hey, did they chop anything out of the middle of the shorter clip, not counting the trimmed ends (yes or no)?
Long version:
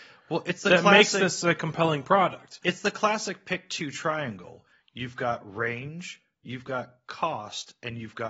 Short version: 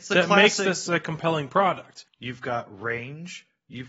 yes